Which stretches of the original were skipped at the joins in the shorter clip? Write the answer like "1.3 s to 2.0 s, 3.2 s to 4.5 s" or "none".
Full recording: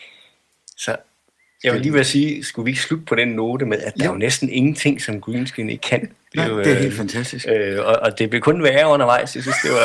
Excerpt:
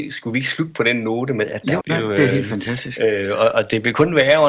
4.1 s to 6.3 s